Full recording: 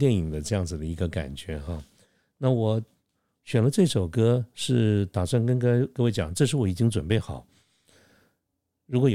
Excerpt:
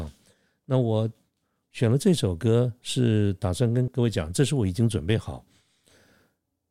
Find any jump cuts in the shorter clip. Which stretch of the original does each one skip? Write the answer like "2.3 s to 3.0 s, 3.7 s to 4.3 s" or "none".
5.6 s to 5.9 s